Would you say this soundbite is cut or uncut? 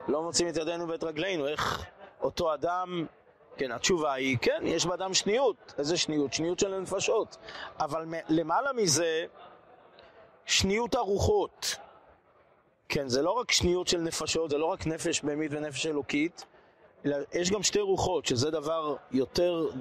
uncut